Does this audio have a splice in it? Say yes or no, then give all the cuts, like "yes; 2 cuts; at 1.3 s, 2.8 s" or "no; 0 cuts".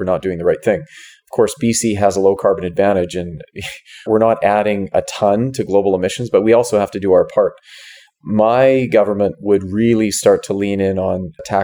no; 0 cuts